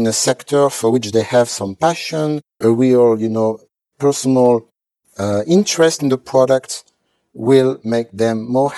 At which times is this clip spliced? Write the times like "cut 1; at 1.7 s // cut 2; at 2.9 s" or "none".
cut 1; at 2.6 s